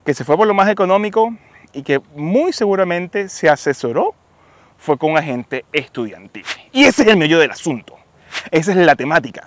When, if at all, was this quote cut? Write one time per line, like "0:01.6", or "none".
0:08.5